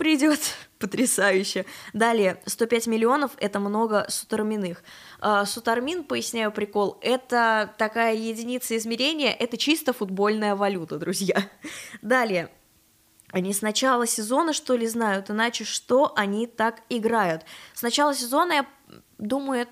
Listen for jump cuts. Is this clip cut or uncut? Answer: uncut